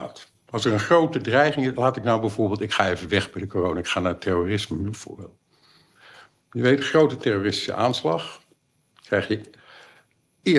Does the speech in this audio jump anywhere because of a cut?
no; 0 cuts

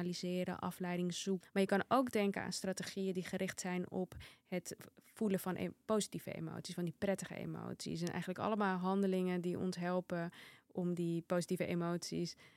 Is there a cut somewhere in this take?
yes; 1 cut; at 1.4 s

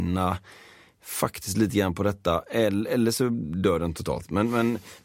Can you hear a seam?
no; 0 cuts

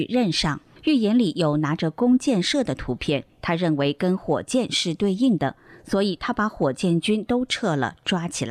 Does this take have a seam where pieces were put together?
no; 0 cuts

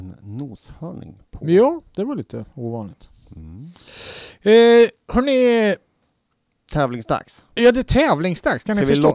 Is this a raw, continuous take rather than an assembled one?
yes; 0 cuts

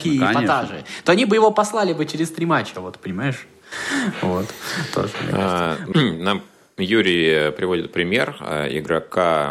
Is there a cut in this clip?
yes; 1 cut; at 5.9 s

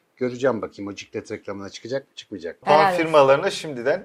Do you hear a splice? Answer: no; 0 cuts

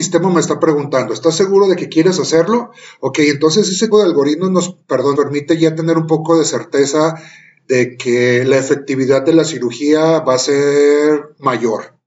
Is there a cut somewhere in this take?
yes; 2 cuts; at 3.9 s, 5.1 s

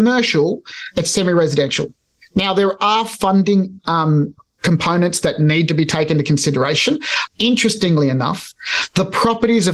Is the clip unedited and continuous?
no; 1 cut; at 7.3 s

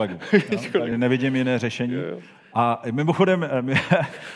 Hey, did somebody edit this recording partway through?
no; 0 cuts

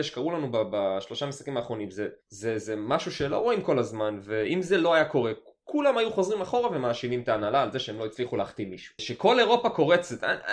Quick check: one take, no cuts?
no; 2 cuts; at 2.2 s, 9.0 s

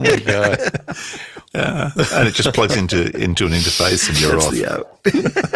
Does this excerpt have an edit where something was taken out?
no; 0 cuts

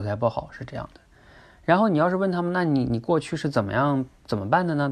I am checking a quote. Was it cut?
no; 0 cuts

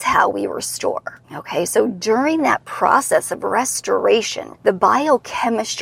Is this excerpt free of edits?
no; 2 cuts; at 1.2 s, 4.5 s

